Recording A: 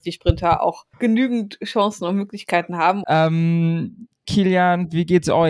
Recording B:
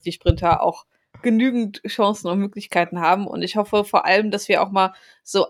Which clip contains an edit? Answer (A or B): A